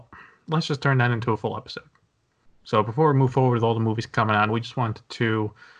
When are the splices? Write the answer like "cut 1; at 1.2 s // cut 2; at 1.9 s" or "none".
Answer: cut 1; at 4.5 s